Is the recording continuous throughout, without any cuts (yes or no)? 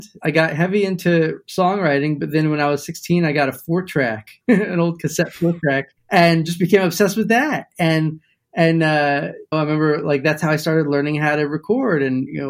no